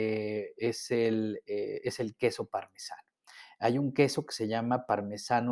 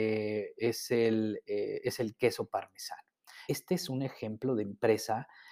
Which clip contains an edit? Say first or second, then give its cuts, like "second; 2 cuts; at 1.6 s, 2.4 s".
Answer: second; 1 cut; at 3.5 s